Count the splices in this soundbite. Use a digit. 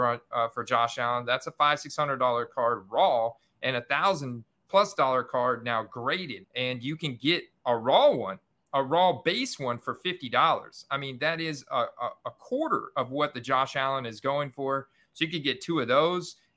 1